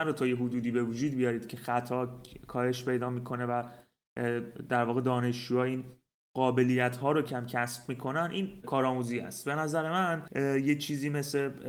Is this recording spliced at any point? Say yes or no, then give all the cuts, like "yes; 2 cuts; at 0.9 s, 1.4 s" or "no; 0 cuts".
yes; 1 cut; at 7.2 s